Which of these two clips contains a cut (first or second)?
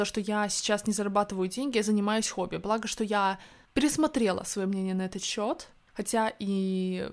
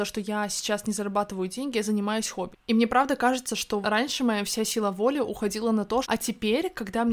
second